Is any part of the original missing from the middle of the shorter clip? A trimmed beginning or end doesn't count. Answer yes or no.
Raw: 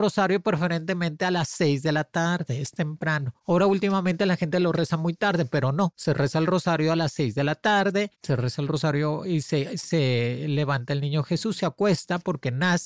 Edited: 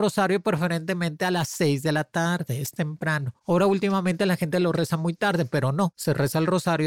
no